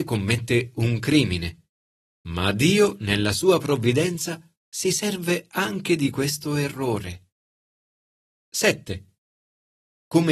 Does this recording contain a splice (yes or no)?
no